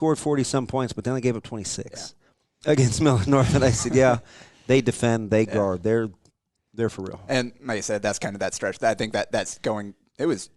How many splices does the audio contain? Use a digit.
0